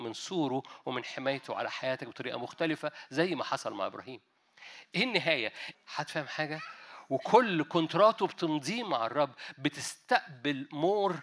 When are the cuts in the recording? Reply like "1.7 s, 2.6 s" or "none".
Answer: 5.7 s